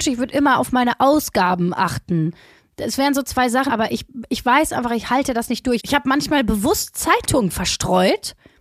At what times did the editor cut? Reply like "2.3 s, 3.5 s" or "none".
3.7 s, 5.8 s